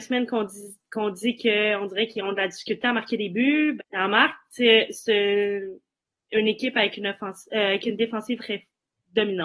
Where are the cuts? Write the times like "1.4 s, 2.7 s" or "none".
3.8 s, 8.4 s